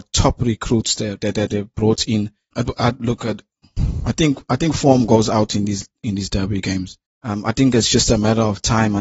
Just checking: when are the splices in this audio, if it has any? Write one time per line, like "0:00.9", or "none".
0:02.5
0:07.1